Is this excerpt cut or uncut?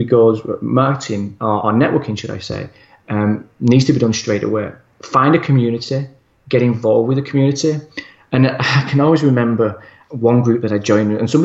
uncut